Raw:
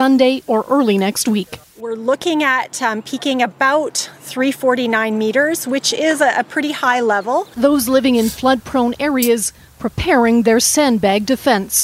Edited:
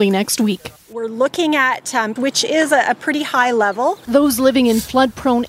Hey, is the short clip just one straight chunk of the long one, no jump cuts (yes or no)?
no